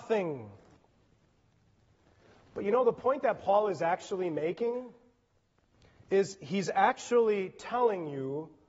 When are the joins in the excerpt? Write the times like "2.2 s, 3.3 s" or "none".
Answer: none